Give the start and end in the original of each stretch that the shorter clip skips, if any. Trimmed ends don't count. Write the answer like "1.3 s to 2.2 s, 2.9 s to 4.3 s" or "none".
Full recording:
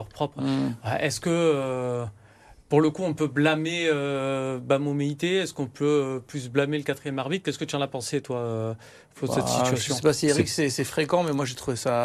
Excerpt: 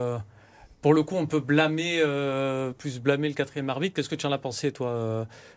4.6 s to 6.2 s